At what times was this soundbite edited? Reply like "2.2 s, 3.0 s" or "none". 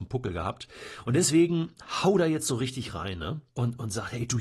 3.5 s